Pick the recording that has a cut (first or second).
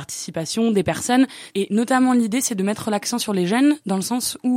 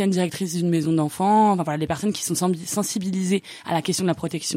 first